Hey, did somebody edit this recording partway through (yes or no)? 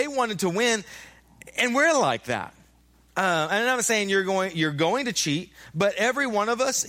no